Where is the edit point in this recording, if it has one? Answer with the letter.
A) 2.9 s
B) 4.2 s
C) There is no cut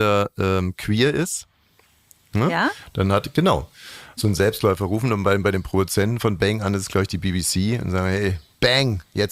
B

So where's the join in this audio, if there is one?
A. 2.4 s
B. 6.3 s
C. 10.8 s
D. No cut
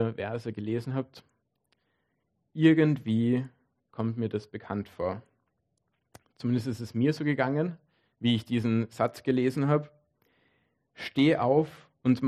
D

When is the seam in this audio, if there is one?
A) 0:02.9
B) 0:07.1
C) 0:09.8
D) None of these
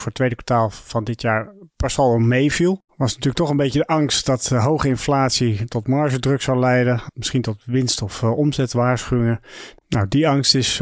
D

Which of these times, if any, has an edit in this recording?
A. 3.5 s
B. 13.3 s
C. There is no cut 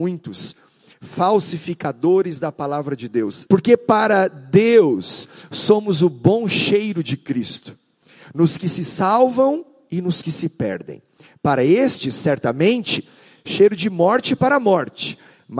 A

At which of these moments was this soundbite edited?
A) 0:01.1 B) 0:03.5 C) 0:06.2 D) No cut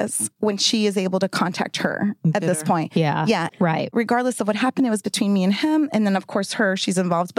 B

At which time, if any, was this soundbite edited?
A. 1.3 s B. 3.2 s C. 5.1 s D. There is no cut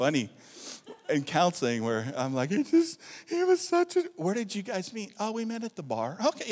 D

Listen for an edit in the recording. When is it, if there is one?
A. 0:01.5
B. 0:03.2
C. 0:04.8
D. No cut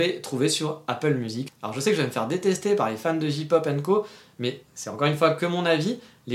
A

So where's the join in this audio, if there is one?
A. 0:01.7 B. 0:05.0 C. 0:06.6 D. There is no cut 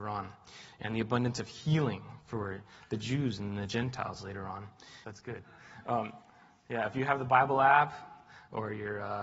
B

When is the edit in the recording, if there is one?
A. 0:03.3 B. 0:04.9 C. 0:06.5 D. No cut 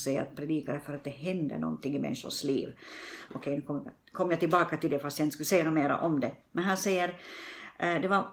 A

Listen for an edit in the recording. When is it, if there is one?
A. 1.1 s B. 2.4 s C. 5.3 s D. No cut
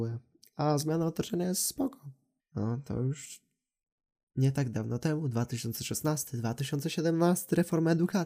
B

